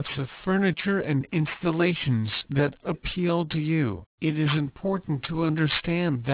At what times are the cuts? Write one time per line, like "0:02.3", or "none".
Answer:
0:04.1

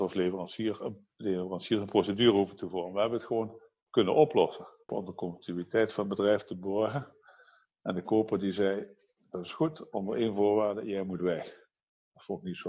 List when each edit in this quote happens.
0:04.9

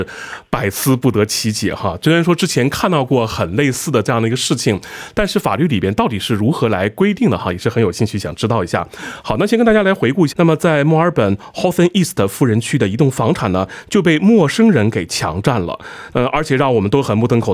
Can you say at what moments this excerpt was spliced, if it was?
0:10.3
0:16.1

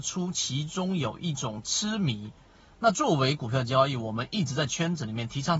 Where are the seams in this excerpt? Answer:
none

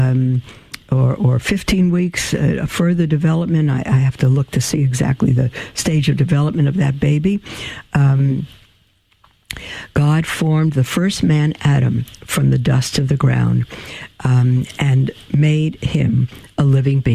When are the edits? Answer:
none

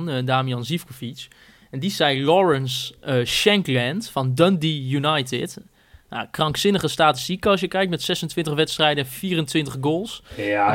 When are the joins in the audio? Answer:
none

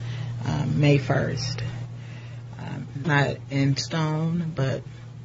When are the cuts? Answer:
0:03.0

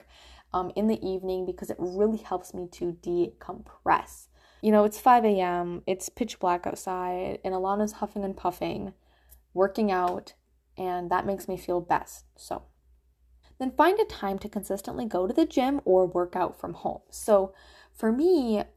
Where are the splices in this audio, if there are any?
0:04.6
0:13.4

